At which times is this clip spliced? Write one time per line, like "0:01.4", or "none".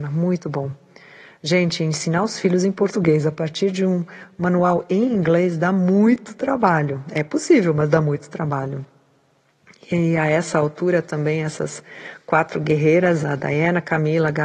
none